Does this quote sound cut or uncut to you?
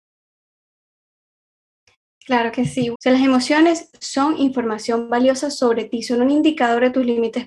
cut